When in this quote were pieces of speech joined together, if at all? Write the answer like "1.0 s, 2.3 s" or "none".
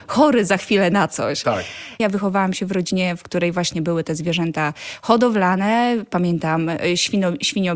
2.0 s